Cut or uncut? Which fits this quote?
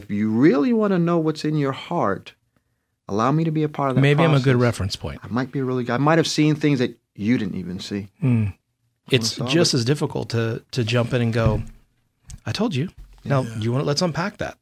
cut